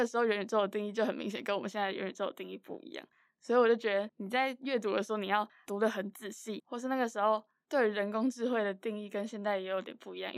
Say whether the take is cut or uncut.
cut